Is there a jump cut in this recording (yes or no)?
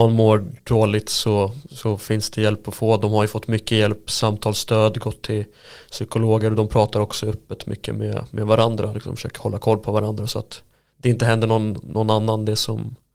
no